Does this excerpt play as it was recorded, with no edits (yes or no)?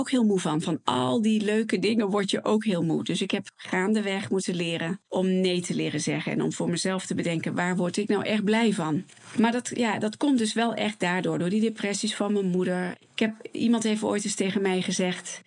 yes